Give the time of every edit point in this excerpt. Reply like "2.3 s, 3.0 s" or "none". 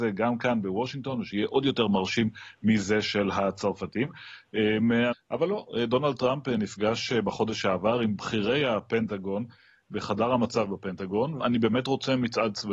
5.1 s, 11.4 s

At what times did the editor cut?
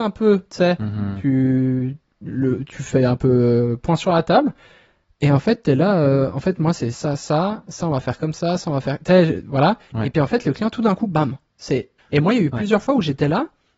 6.9 s, 12.0 s

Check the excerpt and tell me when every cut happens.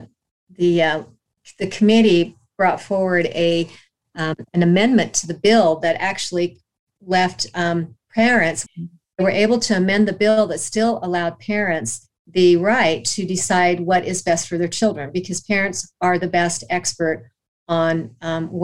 8.7 s

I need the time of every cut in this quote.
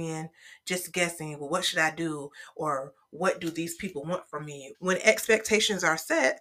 4.7 s

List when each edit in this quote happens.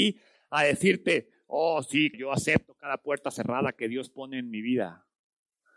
2.1 s

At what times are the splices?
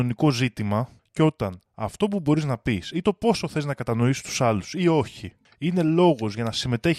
none

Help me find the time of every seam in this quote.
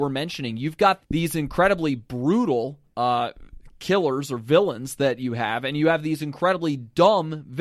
1.0 s

